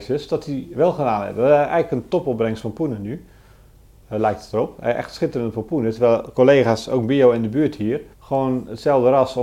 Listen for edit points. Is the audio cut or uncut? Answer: cut